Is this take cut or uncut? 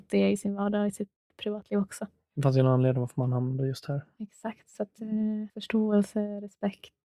uncut